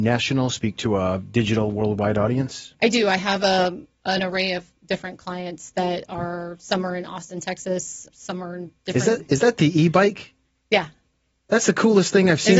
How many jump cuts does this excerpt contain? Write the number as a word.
one